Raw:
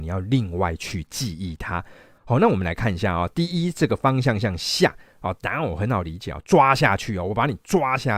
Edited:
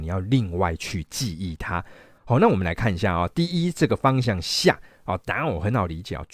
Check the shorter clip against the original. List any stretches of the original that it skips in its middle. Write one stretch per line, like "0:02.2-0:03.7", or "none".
0:04.2-0:04.4